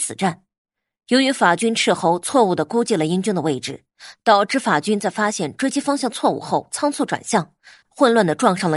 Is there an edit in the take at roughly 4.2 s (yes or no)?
no